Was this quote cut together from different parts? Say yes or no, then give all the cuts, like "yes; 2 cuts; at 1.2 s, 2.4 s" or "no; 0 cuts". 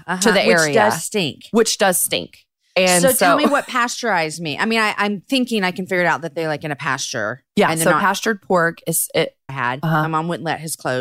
yes; 1 cut; at 9.5 s